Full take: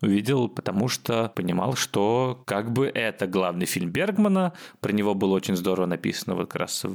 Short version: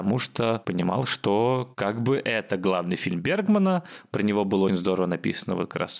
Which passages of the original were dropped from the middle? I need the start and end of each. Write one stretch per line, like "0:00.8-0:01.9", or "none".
0:05.4-0:05.5